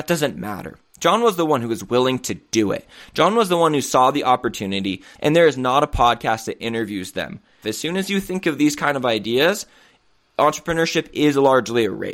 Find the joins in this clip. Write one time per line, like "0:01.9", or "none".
0:05.1
0:07.6